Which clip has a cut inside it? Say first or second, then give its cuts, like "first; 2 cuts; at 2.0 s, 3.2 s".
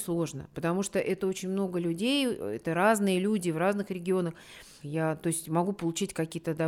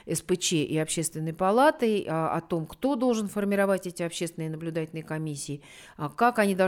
first; 1 cut; at 4.8 s